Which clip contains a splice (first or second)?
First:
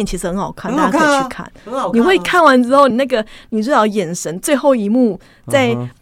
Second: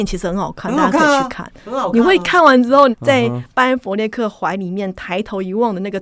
second